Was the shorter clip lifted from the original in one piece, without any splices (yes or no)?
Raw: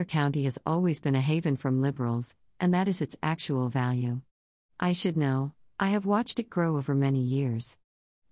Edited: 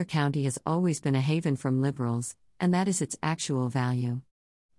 yes